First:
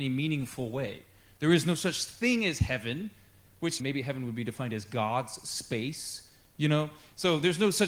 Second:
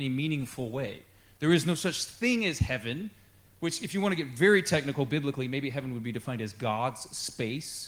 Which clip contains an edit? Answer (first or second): first